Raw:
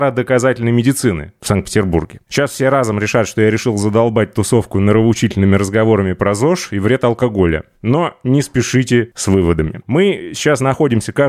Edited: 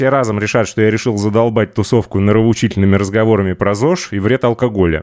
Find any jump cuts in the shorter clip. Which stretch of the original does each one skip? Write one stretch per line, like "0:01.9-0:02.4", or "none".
none